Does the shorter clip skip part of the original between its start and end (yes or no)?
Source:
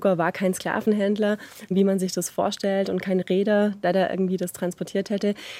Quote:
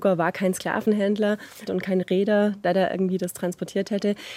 yes